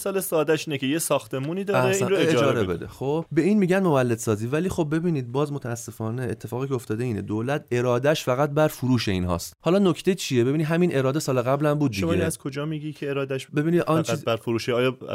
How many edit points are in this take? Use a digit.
0